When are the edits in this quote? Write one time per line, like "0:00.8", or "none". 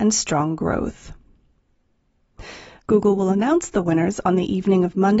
0:02.8